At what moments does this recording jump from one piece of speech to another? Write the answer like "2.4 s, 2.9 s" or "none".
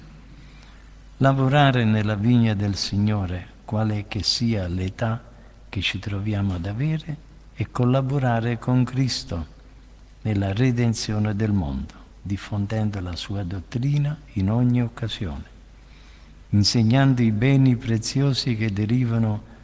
none